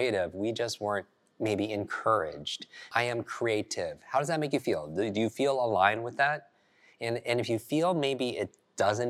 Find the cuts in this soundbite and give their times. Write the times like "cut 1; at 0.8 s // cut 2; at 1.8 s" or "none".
cut 1; at 2.9 s